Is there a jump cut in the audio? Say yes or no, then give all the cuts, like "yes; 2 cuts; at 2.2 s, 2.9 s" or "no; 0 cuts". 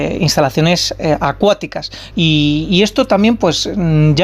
yes; 1 cut; at 2.1 s